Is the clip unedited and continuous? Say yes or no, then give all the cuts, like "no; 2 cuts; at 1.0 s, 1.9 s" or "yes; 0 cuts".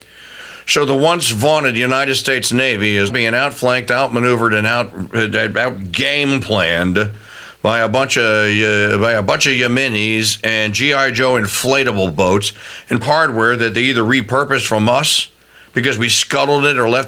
no; 2 cuts; at 3.1 s, 13.0 s